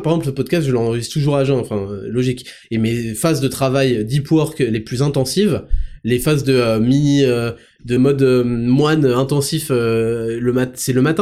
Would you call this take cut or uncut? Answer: cut